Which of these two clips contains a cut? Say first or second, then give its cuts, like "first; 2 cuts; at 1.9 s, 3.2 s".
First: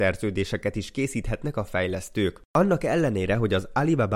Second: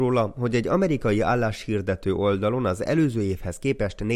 first; 1 cut; at 2.5 s